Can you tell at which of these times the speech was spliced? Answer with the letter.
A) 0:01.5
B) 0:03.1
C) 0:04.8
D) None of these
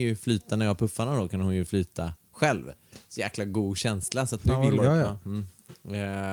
C